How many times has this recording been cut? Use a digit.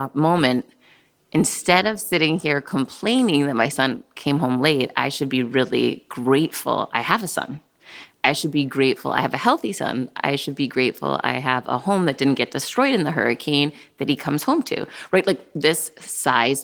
0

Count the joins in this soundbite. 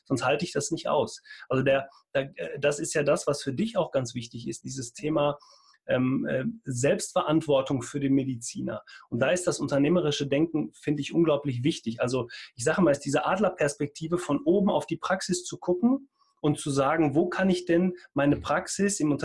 1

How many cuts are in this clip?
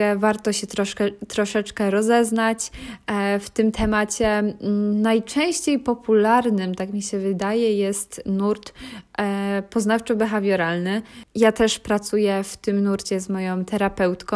0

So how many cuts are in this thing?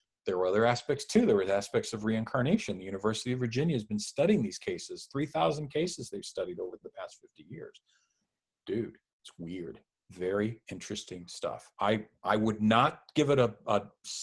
0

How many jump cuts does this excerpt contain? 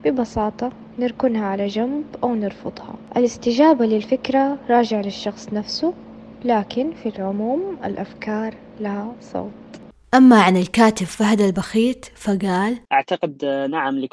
1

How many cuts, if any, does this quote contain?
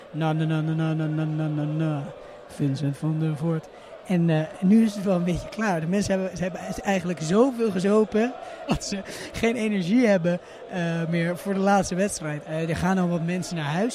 2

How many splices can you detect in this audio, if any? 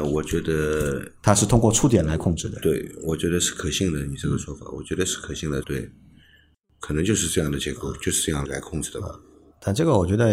2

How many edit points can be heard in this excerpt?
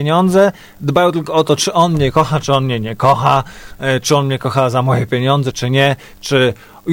1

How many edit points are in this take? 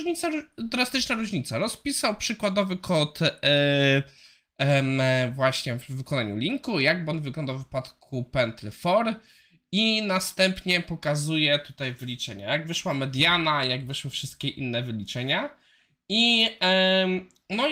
0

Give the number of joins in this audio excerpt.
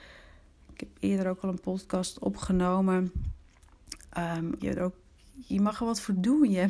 1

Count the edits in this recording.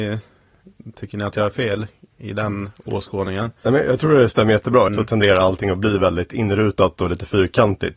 1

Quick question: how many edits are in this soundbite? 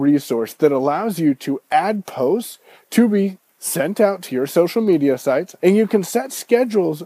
1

